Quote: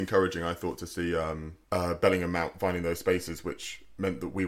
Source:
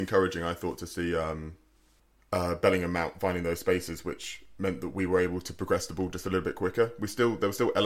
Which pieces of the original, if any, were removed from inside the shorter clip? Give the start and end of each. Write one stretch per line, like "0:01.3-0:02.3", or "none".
0:01.6-0:02.2